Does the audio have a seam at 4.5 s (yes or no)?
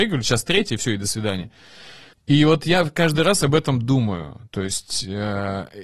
no